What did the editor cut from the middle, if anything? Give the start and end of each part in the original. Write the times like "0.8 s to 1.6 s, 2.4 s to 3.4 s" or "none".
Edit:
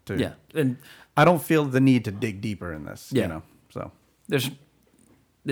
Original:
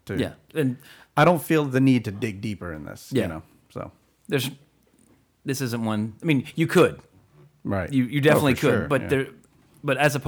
none